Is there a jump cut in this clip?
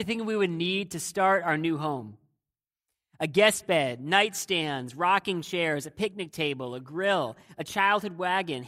no; 0 cuts

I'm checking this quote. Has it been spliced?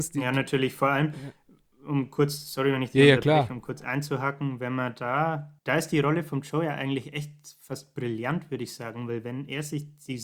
yes; 1 cut; at 5.6 s

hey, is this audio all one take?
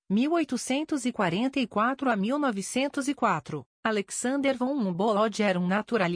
no; 1 cut; at 3.7 s

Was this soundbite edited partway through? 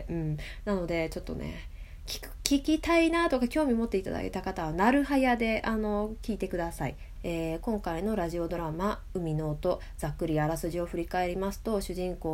yes; 1 cut; at 7.2 s

